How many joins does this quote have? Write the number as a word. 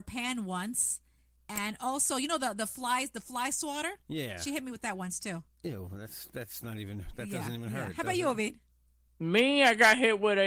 zero